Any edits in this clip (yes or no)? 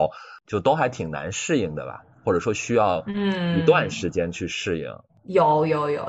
yes